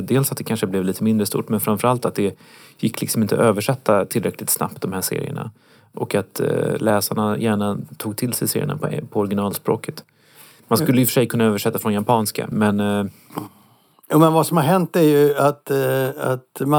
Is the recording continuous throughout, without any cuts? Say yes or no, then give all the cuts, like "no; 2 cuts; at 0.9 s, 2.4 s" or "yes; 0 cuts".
no; 1 cut; at 12.5 s